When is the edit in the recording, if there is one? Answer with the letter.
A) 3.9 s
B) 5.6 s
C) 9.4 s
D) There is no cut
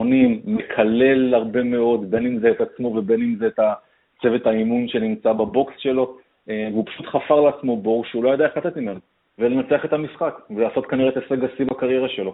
C